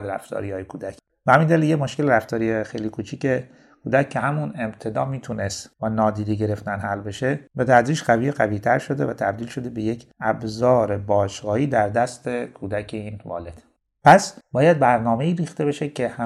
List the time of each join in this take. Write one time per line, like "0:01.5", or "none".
none

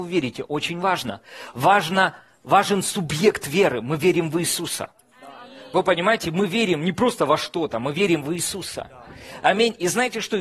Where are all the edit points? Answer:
none

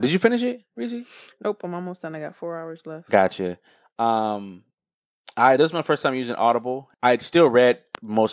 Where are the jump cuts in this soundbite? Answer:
0:06.9

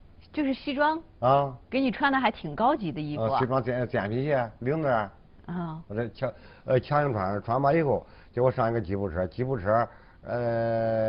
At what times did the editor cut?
none

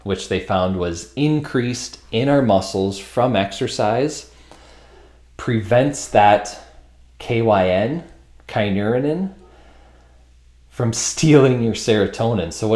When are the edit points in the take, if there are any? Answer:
none

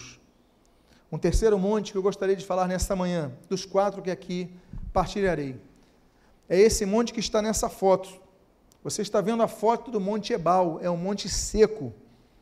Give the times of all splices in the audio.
none

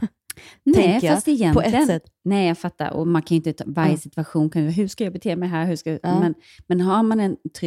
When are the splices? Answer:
none

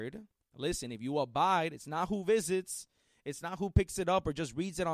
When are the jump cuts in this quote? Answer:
0:03.2

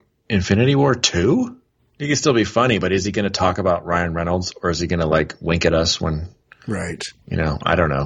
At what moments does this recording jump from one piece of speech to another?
0:01.8

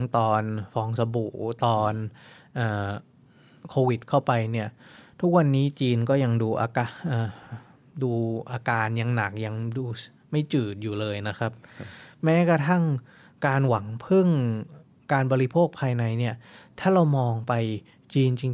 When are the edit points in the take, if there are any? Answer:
none

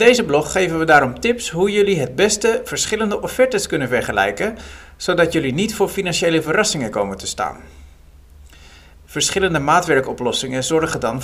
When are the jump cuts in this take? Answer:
0:08.9

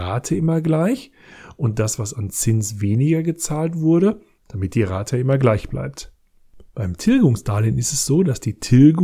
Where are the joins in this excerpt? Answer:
0:04.4

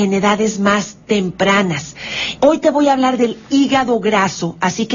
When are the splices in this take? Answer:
0:02.4

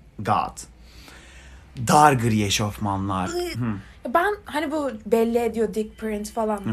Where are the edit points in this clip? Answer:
0:03.5

